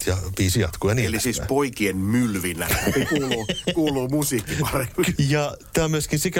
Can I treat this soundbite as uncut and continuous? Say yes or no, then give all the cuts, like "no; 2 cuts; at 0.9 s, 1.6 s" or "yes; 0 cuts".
no; 1 cut; at 5.2 s